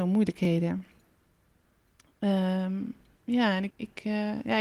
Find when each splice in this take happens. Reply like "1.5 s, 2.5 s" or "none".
3.7 s